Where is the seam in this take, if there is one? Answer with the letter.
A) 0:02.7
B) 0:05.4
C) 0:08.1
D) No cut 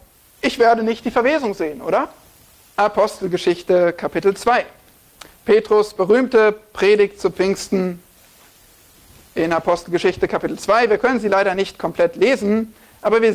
A